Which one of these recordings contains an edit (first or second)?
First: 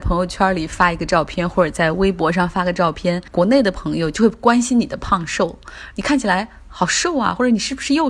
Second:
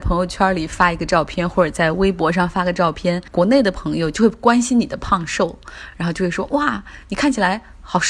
first